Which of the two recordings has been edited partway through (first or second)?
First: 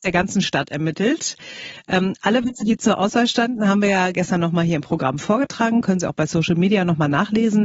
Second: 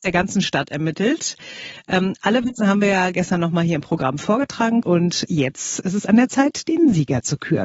second